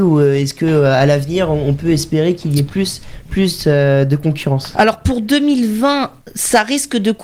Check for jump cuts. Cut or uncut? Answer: uncut